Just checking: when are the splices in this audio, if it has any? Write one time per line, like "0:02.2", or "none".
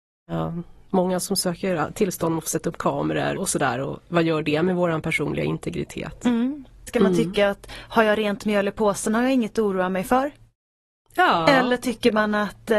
0:03.4
0:06.9

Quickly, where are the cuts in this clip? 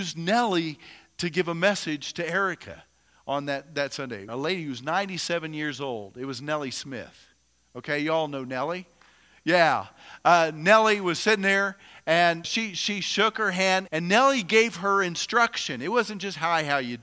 0:04.3
0:12.4
0:13.9

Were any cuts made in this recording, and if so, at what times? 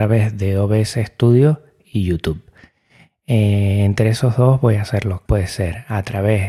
0:05.3

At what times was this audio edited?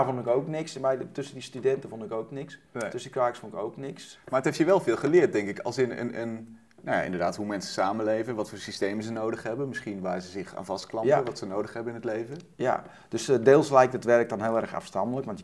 none

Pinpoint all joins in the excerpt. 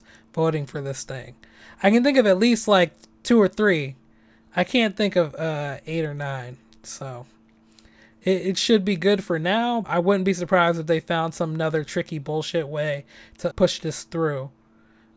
0:09.8
0:13.5

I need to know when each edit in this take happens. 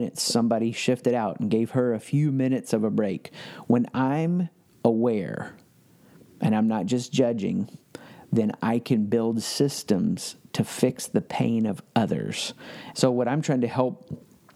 0:12.9

